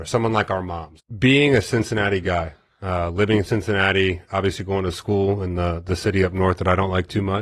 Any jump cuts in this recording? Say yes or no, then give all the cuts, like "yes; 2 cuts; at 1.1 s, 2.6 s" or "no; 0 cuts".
yes; 1 cut; at 1.0 s